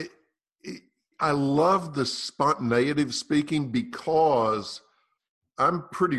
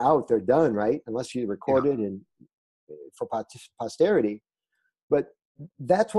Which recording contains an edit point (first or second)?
first